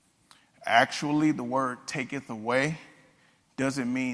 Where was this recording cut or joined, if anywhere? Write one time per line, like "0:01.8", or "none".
none